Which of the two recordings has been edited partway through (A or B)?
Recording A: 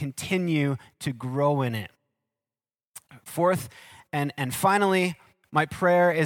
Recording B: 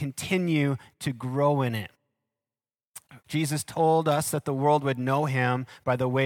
B